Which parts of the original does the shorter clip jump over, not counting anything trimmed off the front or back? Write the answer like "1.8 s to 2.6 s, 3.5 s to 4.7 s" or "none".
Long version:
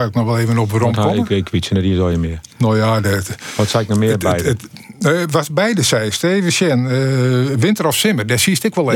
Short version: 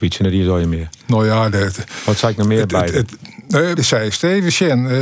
5.3 s to 5.8 s